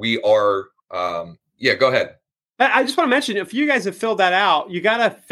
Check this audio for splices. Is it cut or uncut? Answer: cut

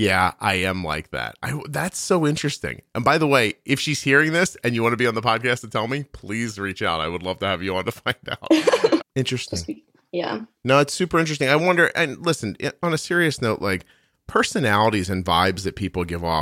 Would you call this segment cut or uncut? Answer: cut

